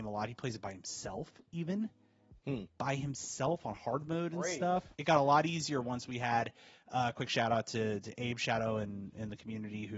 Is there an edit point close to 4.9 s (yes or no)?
yes